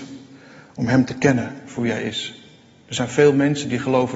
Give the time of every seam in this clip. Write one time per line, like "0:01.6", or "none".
none

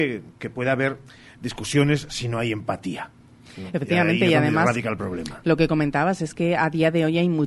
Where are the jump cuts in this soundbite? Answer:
none

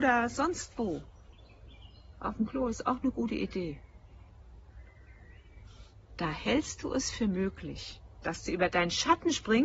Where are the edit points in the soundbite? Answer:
none

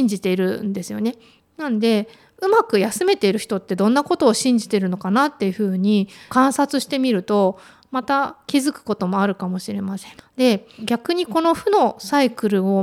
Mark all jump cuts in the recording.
0:10.2

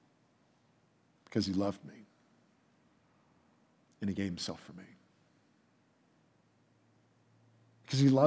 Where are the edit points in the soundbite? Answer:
none

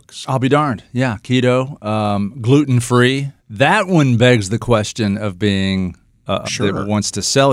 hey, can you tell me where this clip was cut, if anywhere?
0:03.4
0:06.4

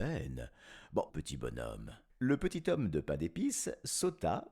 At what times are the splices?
0:01.1

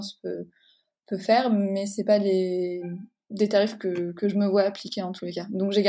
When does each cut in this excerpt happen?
none

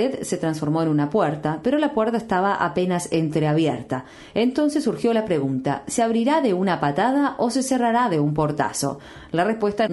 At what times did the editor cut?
none

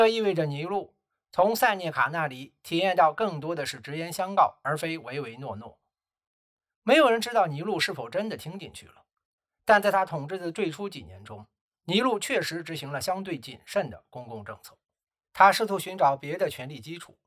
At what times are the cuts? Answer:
0:15.2

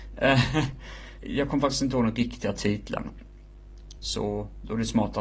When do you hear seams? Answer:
0:01.2
0:04.0

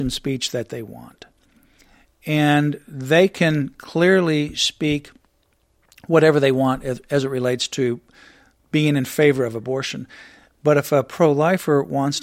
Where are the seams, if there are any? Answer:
none

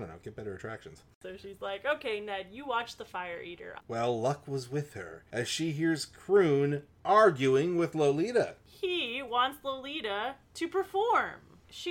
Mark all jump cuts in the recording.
0:03.8

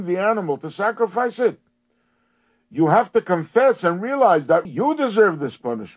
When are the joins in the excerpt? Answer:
0:04.7

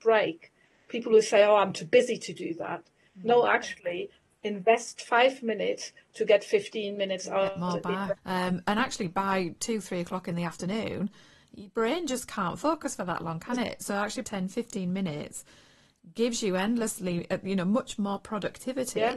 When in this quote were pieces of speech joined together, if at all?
0:08.2
0:14.2

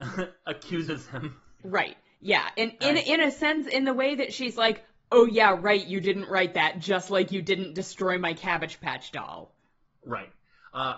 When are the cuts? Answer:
0:01.6

